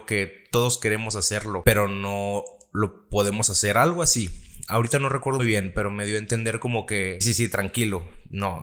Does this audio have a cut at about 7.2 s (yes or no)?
yes